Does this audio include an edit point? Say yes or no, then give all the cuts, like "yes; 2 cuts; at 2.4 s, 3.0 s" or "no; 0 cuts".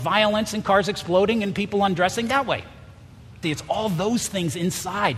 yes; 1 cut; at 3.4 s